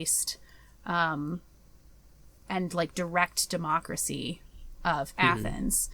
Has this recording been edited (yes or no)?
yes